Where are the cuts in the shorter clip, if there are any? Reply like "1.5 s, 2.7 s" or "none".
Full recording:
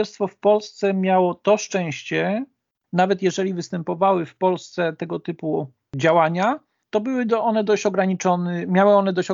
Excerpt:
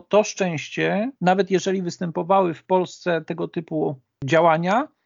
1.2 s